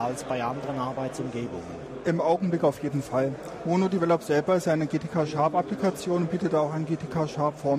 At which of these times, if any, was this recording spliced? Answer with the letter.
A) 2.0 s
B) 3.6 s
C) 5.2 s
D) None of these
D